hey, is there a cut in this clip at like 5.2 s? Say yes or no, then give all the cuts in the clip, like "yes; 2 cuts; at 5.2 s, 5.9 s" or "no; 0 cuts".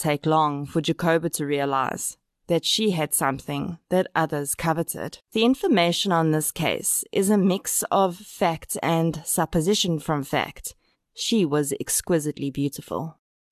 yes; 2 cuts; at 5.2 s, 10.9 s